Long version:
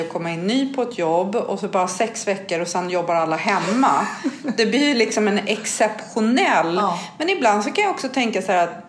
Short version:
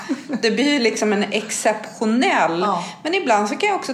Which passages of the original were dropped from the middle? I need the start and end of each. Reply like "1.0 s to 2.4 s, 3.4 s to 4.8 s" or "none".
none